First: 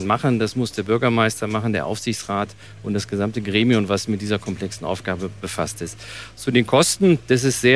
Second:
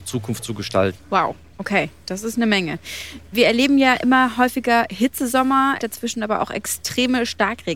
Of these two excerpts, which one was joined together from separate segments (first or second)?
second